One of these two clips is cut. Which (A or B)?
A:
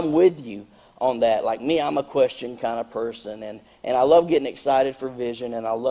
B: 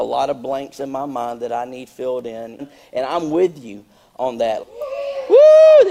B